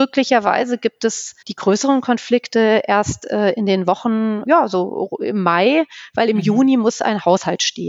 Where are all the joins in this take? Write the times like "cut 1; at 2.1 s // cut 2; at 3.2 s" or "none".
cut 1; at 1.4 s // cut 2; at 4.5 s